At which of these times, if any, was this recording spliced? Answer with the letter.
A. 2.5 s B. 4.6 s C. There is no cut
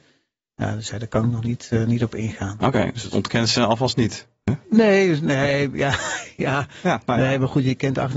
B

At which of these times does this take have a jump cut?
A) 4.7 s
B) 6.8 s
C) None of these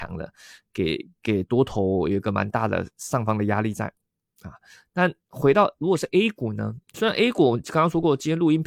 B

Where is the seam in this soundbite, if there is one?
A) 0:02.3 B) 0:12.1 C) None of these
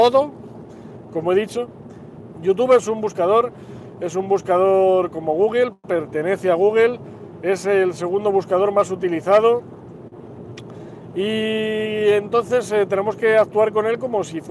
A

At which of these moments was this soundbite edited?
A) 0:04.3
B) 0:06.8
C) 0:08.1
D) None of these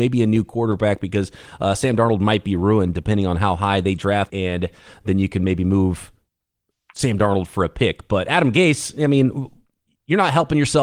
A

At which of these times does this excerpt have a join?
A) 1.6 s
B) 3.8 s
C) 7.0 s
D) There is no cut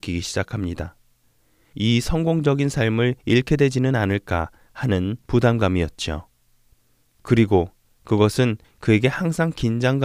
C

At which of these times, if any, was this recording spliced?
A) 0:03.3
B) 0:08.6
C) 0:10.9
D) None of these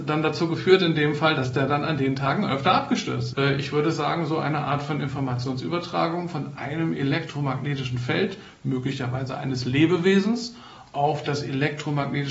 A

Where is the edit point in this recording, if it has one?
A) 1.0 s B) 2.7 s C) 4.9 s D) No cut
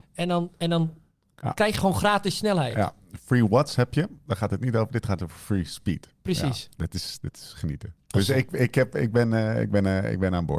D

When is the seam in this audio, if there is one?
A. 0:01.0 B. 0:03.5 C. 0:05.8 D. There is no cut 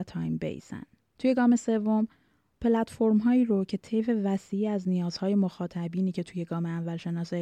A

